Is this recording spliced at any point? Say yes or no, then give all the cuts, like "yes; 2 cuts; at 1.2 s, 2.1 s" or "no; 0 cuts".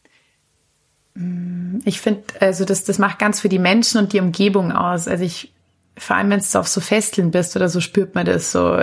no; 0 cuts